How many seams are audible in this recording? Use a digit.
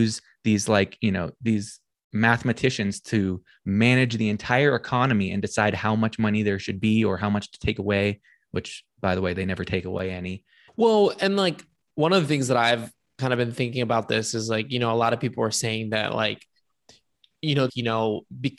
2